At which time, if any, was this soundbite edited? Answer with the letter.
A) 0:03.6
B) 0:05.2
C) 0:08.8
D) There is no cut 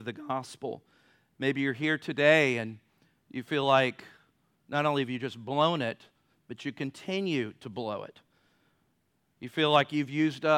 D